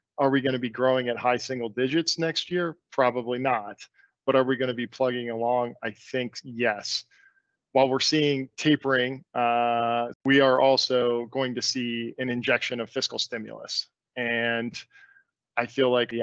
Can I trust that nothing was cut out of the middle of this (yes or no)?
no